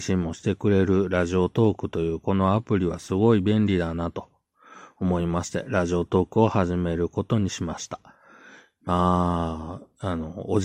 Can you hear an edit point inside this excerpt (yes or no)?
no